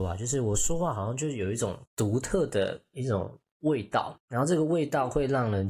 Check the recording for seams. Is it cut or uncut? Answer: uncut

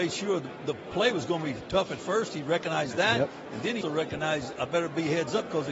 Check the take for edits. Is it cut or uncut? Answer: cut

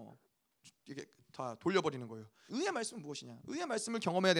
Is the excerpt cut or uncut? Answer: cut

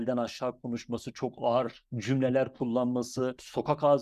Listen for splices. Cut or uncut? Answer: uncut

